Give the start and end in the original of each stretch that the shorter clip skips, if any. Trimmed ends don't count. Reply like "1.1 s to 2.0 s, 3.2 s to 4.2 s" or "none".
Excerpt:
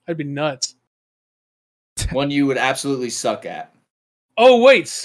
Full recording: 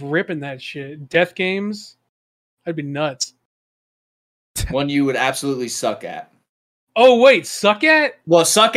none